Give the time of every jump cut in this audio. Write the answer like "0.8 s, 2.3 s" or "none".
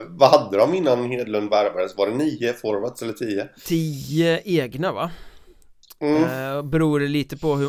none